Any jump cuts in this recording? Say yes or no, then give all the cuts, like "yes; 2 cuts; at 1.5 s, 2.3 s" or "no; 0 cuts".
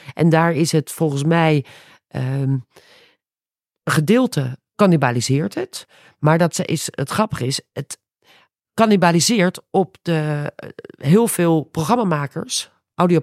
no; 0 cuts